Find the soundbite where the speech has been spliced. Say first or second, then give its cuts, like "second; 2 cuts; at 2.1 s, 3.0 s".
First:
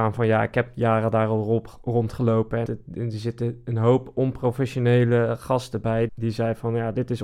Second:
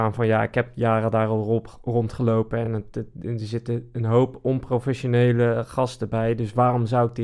first; 2 cuts; at 2.7 s, 6.1 s